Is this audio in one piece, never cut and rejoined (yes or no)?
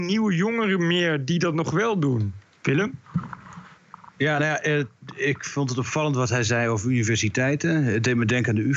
yes